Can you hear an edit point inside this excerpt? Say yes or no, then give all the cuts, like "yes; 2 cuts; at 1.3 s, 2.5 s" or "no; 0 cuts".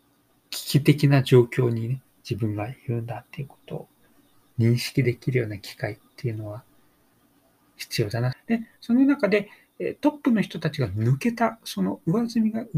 yes; 1 cut; at 8.3 s